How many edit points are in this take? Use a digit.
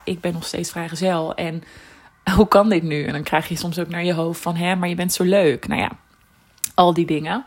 0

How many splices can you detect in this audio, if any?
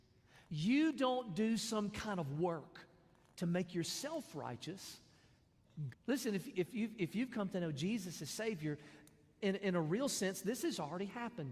2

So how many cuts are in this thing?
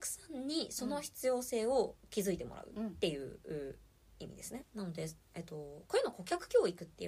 1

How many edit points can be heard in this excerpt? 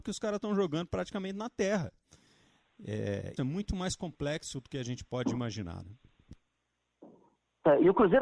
1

